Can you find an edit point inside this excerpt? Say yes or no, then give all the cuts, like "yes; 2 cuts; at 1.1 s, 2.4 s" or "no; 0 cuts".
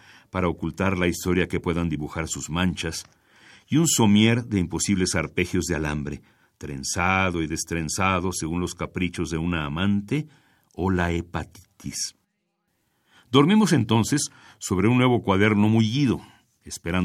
no; 0 cuts